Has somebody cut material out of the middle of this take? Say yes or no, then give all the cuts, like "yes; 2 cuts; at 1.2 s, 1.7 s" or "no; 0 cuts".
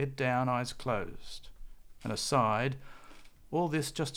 no; 0 cuts